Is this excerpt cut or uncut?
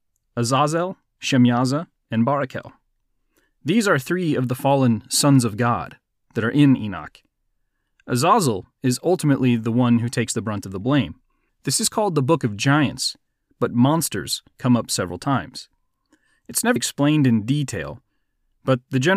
cut